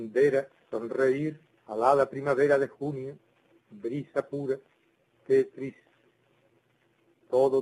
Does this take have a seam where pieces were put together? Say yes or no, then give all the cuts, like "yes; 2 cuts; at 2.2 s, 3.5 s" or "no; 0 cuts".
yes; 2 cuts; at 1.5 s, 5.0 s